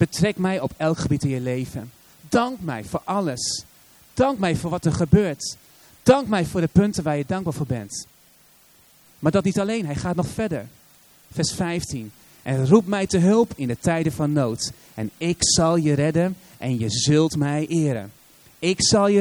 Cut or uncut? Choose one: uncut